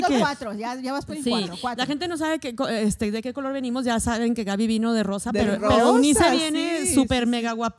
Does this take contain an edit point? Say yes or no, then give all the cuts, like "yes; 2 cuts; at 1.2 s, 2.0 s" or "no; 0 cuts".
no; 0 cuts